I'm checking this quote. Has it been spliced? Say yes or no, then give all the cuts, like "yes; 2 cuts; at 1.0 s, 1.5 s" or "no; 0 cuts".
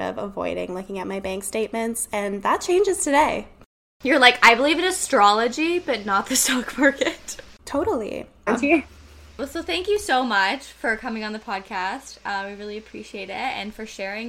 yes; 1 cut; at 8.5 s